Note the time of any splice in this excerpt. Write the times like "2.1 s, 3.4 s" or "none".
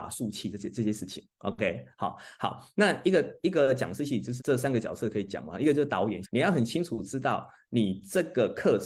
4.4 s, 6.2 s

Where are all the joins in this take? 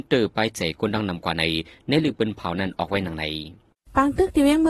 none

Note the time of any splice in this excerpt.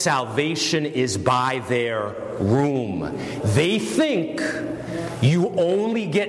3.4 s

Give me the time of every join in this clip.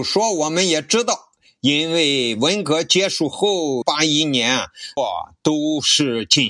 3.8 s, 5.0 s

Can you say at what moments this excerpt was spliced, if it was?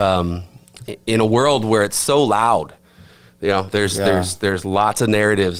none

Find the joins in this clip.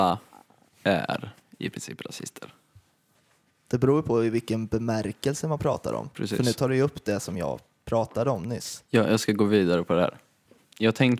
none

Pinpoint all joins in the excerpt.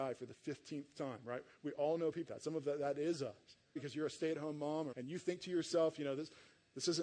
2.3 s, 3.8 s, 4.9 s

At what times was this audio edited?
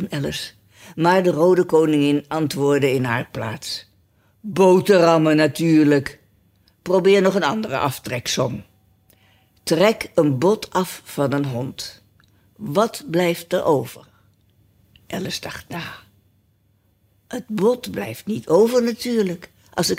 none

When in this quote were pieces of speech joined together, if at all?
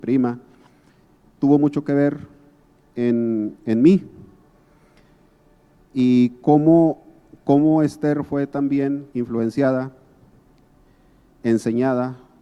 5.7 s, 9.1 s

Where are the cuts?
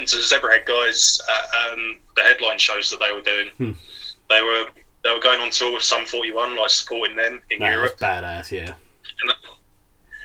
none

